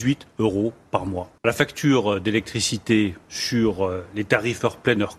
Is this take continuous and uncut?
no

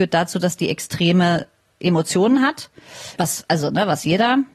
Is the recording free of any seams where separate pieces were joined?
no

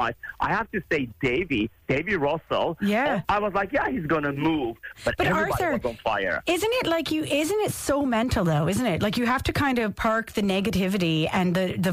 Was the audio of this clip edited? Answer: yes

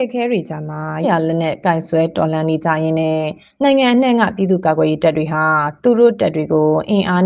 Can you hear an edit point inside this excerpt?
yes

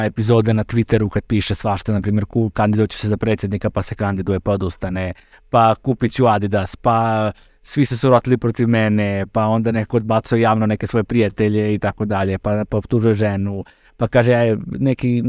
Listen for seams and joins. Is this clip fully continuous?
yes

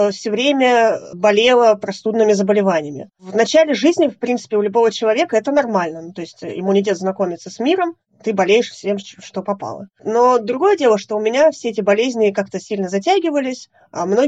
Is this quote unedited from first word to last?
no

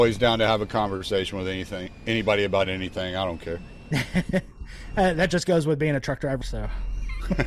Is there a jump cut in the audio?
yes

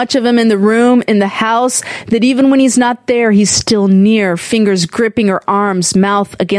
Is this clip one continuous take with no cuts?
yes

